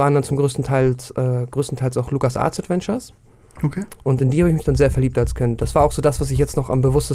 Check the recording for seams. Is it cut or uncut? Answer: uncut